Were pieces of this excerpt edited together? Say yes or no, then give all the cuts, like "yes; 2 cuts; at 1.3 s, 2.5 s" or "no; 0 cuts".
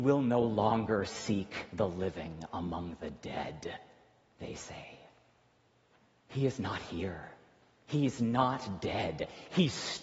no; 0 cuts